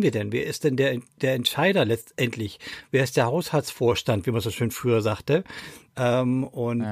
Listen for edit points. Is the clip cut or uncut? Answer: cut